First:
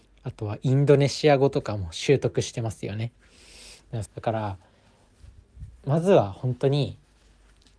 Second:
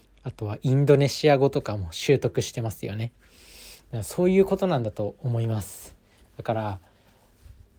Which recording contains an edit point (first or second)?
first